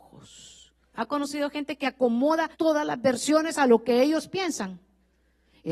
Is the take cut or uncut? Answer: cut